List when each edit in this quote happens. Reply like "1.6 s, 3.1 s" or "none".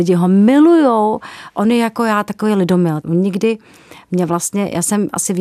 3.0 s

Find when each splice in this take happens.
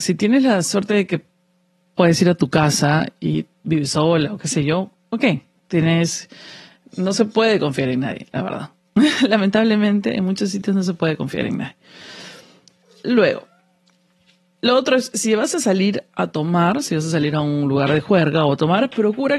5.6 s

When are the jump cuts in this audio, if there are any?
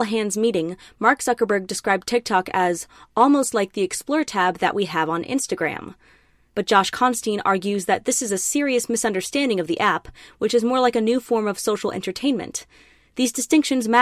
none

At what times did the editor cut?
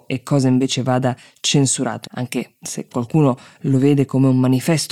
2.0 s

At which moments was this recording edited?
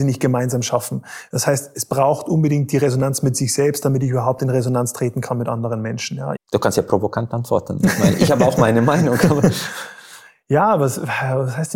6.4 s

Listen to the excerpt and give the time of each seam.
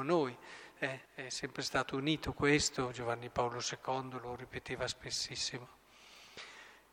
1.1 s

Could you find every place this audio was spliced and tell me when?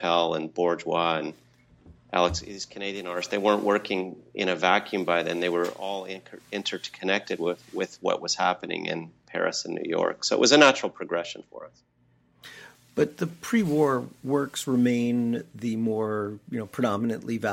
none

